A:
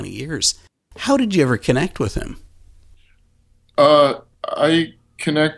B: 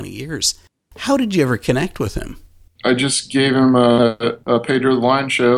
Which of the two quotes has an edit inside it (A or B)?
B